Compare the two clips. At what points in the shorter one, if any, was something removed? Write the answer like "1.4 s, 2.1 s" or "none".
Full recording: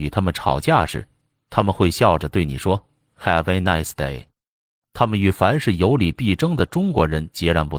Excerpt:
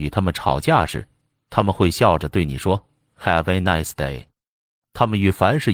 none

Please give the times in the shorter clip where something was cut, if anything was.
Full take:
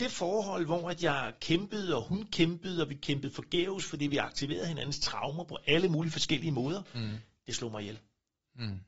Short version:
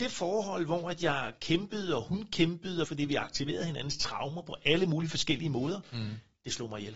2.8 s

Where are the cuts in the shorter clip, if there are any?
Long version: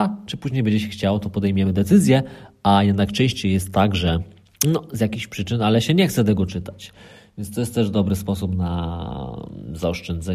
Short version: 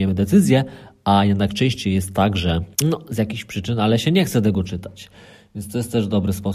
2.7 s

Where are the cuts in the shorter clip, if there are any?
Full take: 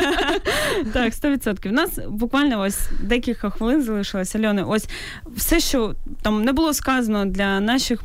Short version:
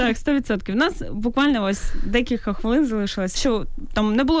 3.4 s

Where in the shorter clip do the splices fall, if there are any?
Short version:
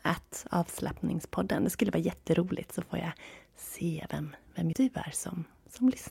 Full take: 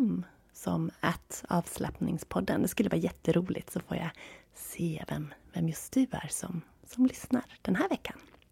4.7 s

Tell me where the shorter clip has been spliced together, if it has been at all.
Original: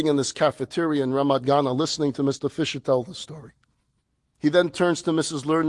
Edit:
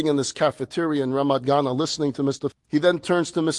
2.5 s

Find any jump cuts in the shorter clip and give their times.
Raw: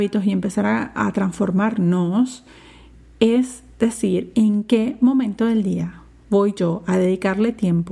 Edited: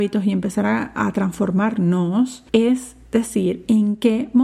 2.5 s

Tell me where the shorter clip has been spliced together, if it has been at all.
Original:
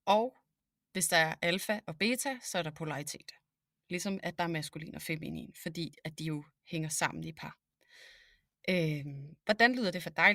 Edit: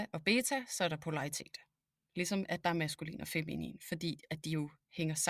none

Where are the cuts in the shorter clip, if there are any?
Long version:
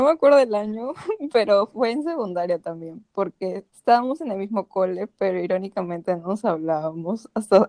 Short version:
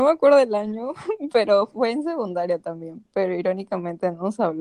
3.1 s

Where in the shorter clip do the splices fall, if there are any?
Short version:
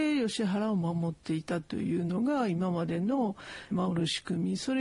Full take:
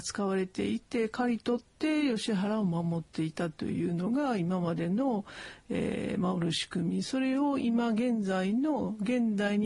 3.7 s

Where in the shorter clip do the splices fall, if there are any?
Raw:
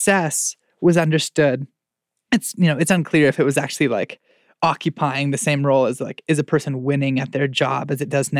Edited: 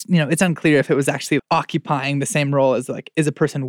1.4 s

